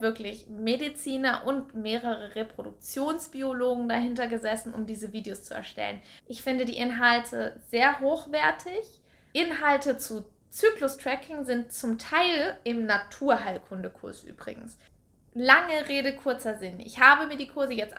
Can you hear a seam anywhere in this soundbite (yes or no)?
yes